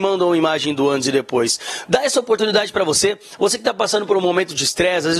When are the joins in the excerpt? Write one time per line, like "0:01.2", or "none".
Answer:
none